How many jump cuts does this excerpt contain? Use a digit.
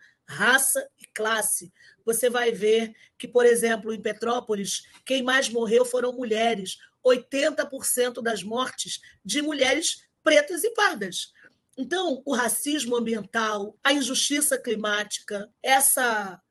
0